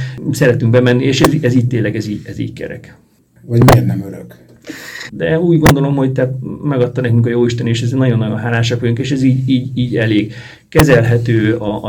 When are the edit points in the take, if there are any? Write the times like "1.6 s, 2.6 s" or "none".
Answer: 3.4 s, 5.1 s